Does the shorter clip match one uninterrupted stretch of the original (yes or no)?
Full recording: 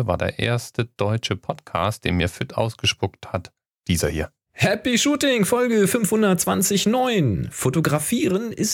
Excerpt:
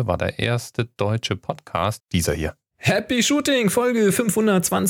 no